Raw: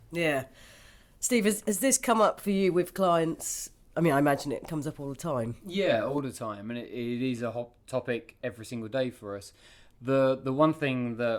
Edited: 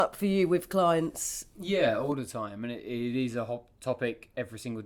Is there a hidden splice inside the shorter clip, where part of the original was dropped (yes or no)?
yes